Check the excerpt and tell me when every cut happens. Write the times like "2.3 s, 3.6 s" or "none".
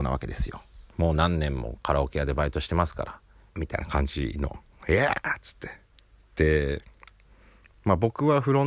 3.6 s